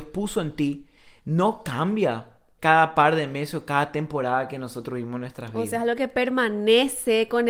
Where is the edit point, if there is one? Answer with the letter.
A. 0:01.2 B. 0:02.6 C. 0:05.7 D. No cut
B